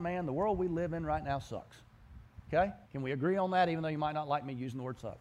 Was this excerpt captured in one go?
no; 1 cut; at 2.8 s

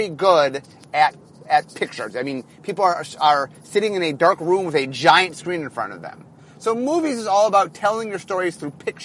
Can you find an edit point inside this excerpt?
no; 0 cuts

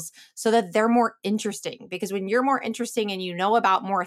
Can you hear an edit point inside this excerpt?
no; 0 cuts

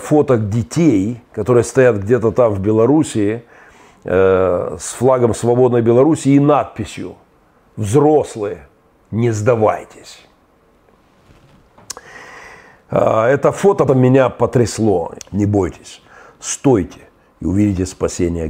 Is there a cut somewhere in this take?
yes; 2 cuts; at 13.9 s, 15.2 s

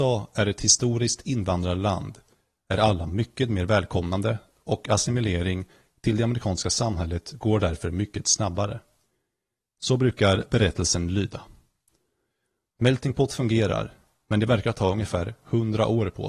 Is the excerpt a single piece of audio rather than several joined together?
no; 1 cut; at 12.7 s

